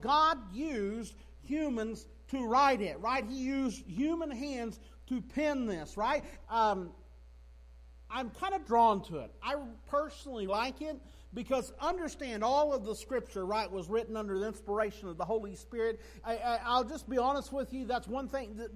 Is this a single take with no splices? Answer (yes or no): no